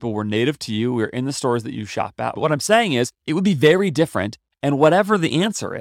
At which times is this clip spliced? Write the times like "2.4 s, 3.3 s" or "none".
2.4 s